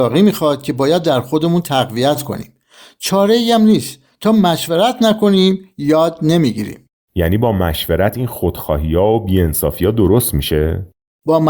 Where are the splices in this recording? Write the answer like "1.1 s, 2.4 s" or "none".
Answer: none

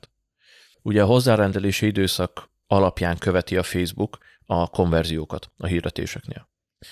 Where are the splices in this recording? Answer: none

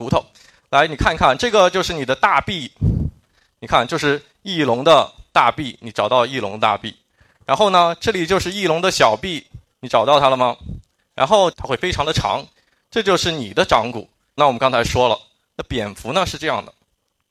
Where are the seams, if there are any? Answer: 11.5 s, 14.4 s

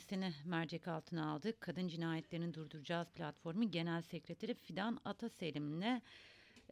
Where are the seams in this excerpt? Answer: none

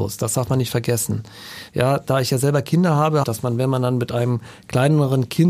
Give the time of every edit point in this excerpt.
1.7 s, 3.2 s

